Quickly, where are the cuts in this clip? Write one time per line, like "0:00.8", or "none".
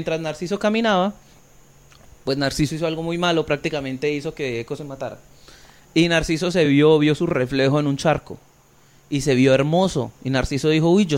none